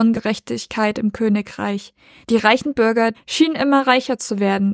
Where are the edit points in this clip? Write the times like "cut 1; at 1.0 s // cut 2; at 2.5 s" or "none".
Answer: cut 1; at 3.1 s